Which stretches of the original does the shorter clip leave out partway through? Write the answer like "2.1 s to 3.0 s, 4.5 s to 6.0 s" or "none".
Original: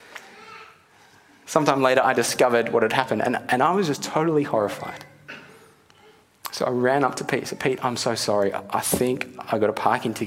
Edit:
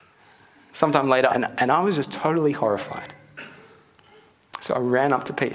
2.0 s to 3.2 s